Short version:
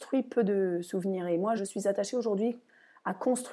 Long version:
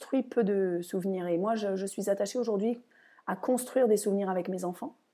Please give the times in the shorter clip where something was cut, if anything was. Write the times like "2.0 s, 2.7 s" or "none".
1.6 s